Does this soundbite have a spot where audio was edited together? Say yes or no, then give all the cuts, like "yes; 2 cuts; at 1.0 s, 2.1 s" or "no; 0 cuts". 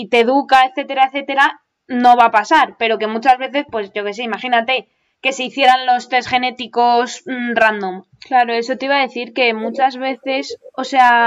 yes; 1 cut; at 8.1 s